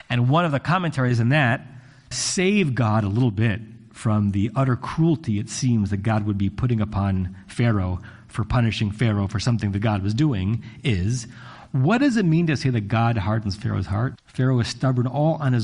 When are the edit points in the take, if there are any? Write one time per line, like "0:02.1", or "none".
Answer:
0:02.1
0:14.2